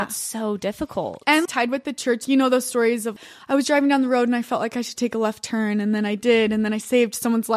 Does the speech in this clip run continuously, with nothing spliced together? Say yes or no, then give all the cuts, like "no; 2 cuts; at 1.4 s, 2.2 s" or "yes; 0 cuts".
no; 1 cut; at 1.5 s